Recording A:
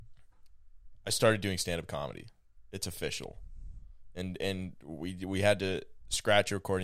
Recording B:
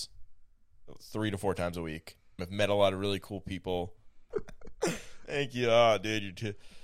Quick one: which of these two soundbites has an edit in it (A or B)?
B